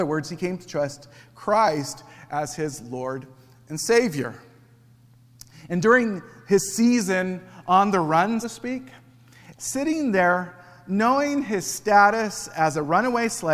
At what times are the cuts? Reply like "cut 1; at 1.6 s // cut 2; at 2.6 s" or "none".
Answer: cut 1; at 8.4 s // cut 2; at 9.6 s

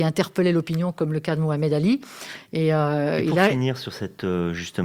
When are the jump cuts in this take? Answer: none

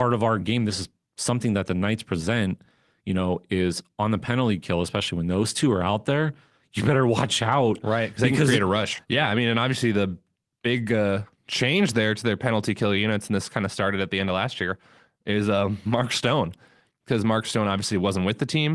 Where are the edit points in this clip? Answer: cut 1; at 9.0 s

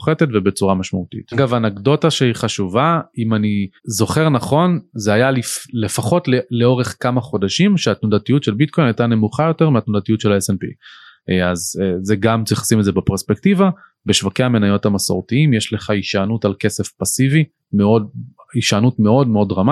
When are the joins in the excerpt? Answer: cut 1; at 1.3 s // cut 2; at 3.8 s

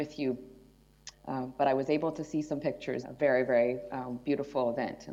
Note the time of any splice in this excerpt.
cut 1; at 1.1 s // cut 2; at 3.0 s

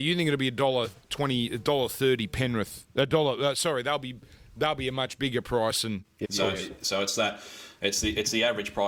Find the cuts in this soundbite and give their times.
cut 1; at 6.2 s

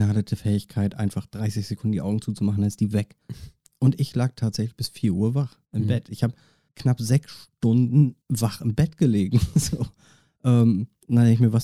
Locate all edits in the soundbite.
none

